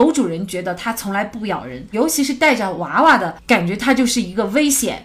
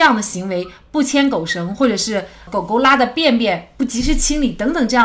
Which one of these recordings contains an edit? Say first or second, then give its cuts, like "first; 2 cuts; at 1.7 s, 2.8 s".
first; 1 cut; at 1.9 s